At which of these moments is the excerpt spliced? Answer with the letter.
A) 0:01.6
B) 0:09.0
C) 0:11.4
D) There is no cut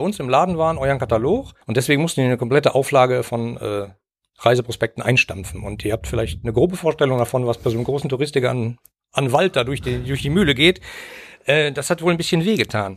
A